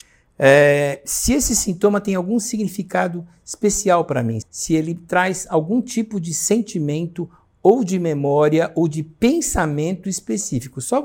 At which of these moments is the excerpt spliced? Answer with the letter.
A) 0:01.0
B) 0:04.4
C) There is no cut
B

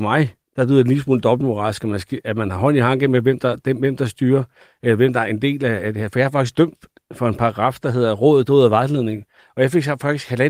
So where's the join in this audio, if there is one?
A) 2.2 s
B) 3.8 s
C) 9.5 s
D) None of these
D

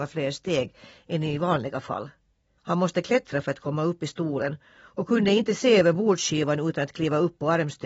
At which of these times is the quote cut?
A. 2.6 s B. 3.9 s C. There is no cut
A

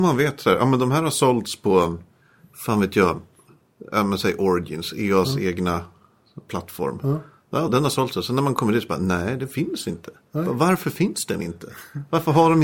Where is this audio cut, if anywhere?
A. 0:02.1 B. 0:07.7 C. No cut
B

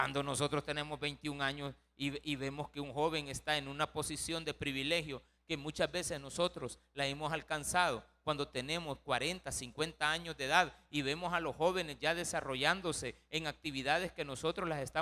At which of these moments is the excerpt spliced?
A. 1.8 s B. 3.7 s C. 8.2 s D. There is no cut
D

